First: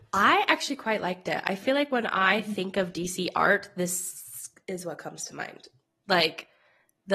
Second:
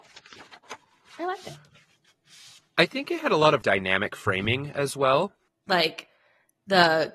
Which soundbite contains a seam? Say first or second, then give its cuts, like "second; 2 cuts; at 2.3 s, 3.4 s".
second; 2 cuts; at 3.6 s, 5.5 s